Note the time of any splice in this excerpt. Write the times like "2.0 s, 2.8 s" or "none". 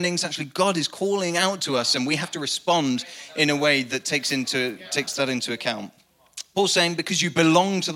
none